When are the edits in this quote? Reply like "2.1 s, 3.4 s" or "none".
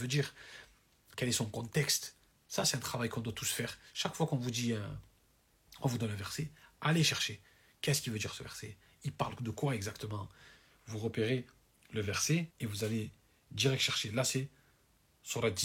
1.1 s, 2.3 s, 12.5 s